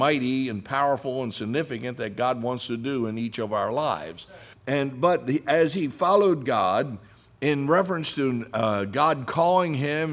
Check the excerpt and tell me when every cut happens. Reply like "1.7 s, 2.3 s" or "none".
4.5 s